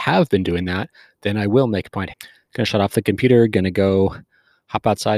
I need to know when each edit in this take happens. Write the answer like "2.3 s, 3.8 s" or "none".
2.1 s